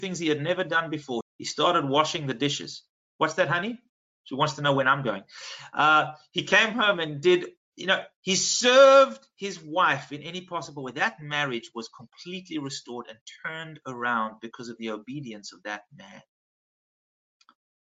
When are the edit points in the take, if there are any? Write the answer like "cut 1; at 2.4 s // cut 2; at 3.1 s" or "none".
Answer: cut 1; at 1.2 s